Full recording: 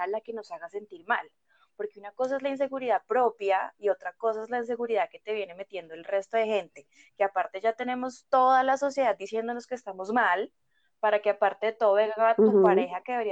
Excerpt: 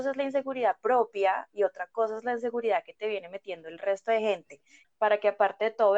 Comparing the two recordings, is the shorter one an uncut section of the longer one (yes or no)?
no